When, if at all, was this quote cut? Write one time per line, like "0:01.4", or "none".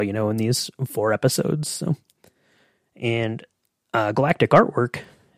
none